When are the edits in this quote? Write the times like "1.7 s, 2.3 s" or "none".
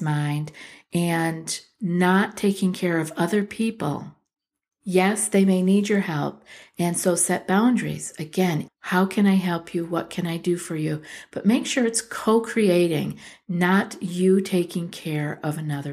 8.7 s

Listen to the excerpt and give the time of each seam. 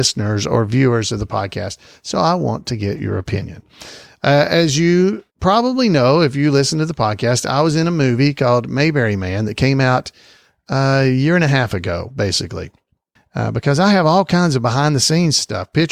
5.3 s, 13.2 s

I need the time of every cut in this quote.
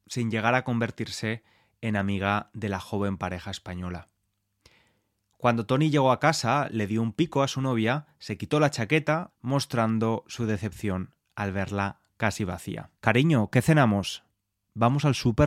9.3 s, 13.0 s

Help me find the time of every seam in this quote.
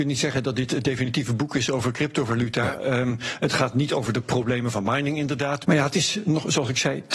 5.6 s

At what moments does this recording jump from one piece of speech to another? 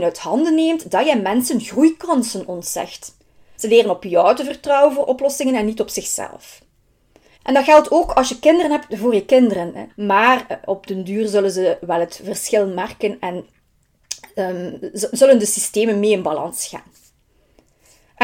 3.5 s, 7.3 s, 9.9 s

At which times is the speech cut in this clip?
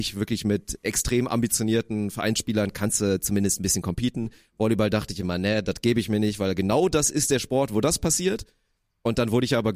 none

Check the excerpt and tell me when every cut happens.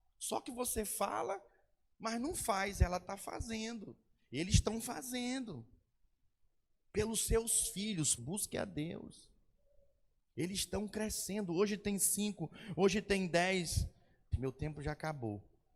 8.2 s, 14.3 s

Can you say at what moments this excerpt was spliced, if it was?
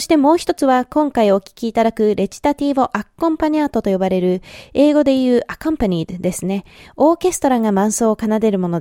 none

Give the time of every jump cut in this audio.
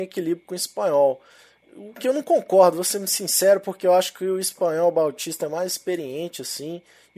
none

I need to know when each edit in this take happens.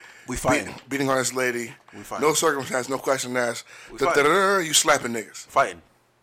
none

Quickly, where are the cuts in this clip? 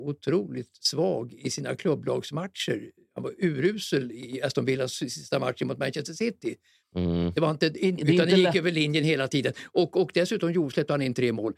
8.0 s

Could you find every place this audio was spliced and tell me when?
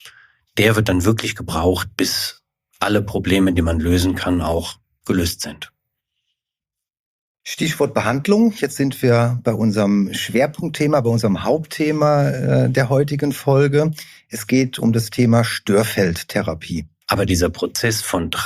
17.0 s

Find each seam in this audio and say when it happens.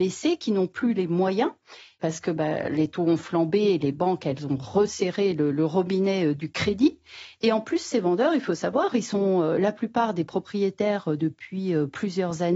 none

